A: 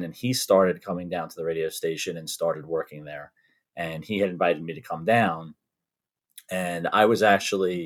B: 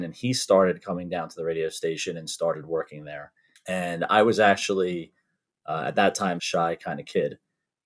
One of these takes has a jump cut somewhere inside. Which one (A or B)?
B